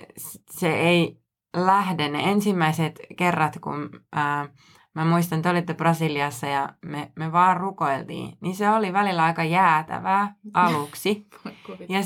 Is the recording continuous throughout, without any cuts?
yes; 0 cuts

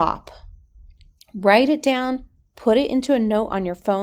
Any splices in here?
no; 0 cuts

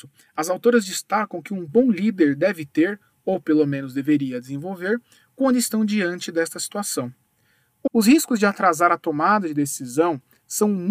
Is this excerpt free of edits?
no; 1 cut; at 7.9 s

